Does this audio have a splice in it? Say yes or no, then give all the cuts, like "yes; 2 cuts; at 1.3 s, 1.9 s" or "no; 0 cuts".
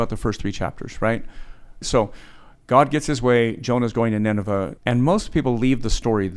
yes; 2 cuts; at 1.8 s, 4.8 s